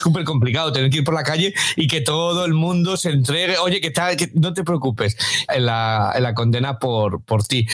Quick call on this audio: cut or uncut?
cut